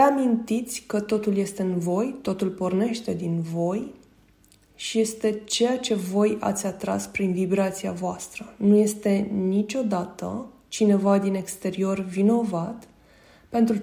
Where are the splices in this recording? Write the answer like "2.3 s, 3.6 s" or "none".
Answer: none